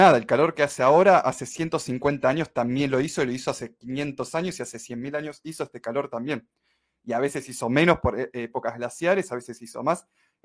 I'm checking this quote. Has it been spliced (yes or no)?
no